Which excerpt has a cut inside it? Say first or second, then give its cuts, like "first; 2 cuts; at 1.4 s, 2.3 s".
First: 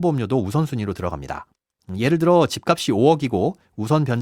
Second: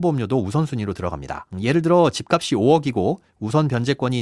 second; 1 cut; at 1.5 s